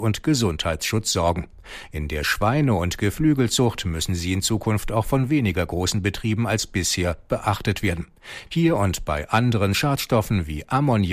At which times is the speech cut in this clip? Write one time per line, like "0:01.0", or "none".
0:08.5